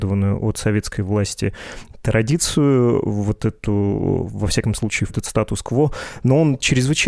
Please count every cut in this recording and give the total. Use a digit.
1